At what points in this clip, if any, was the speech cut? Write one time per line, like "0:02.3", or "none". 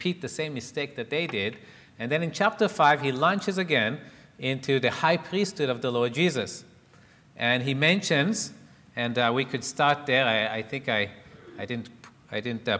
none